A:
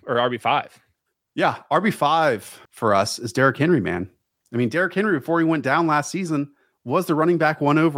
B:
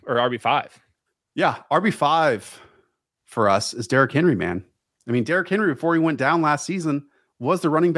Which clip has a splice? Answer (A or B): A